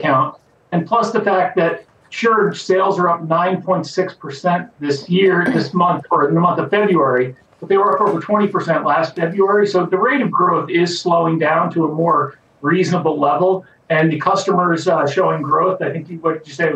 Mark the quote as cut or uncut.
uncut